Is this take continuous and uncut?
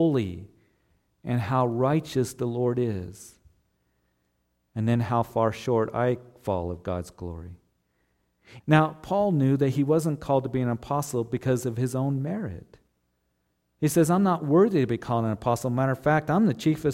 no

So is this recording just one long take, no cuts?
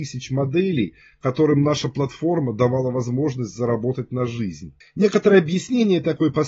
no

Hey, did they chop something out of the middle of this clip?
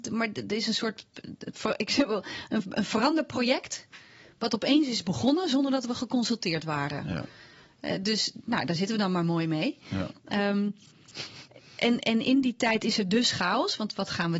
no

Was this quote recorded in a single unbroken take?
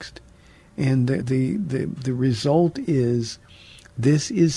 no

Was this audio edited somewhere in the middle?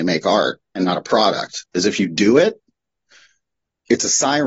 no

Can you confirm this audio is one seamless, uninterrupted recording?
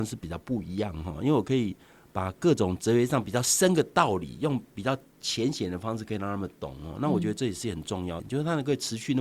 no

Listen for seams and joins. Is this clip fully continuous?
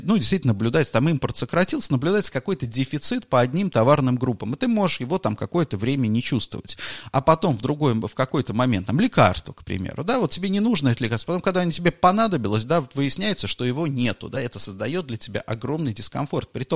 yes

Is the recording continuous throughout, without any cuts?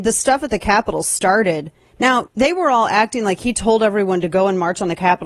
no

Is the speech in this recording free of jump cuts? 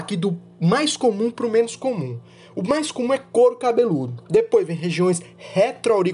yes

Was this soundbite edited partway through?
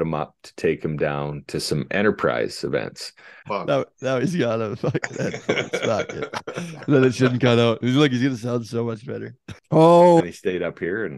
yes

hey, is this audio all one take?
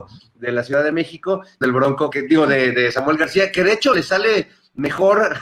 no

